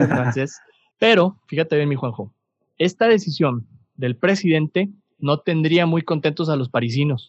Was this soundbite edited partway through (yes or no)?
yes